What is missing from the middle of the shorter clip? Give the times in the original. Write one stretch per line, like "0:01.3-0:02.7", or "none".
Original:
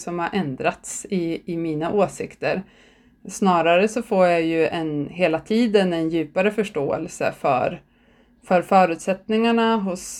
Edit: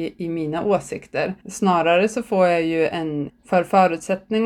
0:02.7-0:03.2
0:05.1-0:08.3